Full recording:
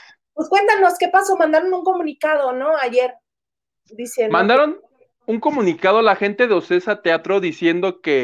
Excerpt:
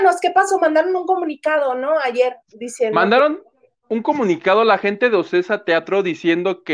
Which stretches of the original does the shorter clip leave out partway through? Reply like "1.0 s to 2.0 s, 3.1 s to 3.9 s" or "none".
3.2 s to 3.8 s